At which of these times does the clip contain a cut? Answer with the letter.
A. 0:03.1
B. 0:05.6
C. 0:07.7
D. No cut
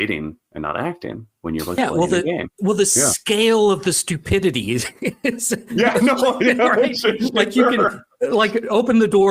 D